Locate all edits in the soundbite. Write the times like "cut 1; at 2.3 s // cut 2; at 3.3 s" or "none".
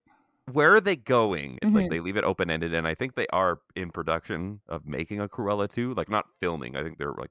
cut 1; at 1.6 s